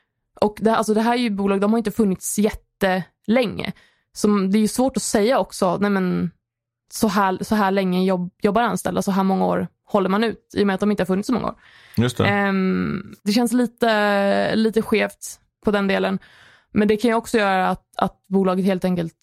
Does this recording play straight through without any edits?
yes; 0 cuts

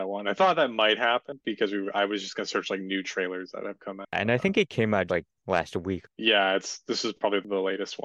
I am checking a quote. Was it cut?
yes; 1 cut; at 5.1 s

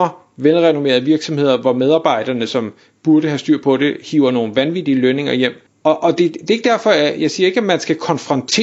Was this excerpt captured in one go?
no; 1 cut; at 5.7 s

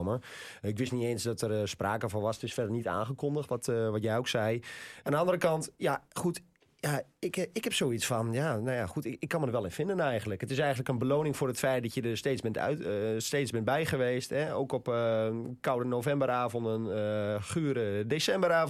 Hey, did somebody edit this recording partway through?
yes; 1 cut; at 5.0 s

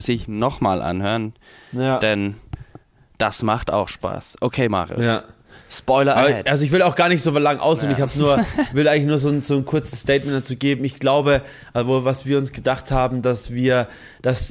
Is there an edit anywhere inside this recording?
no; 0 cuts

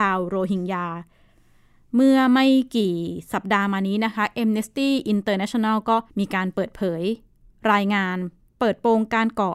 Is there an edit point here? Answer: yes; 1 cut; at 6.1 s

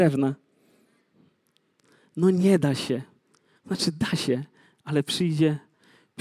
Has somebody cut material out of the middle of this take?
no; 0 cuts

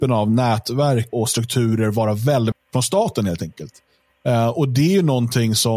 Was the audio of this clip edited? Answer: yes; 2 cuts; at 1.1 s, 2.5 s

